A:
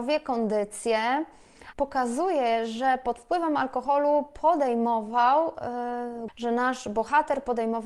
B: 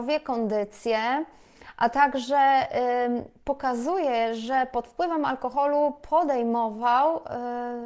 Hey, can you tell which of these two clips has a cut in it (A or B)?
A